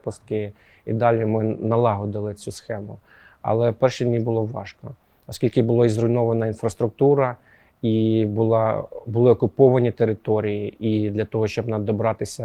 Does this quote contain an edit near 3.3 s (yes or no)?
no